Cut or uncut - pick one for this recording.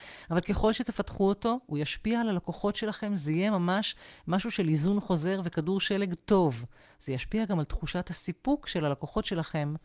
uncut